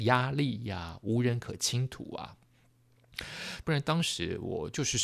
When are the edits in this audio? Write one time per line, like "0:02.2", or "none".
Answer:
0:03.6